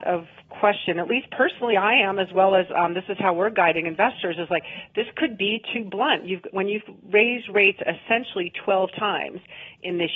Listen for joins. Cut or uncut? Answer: uncut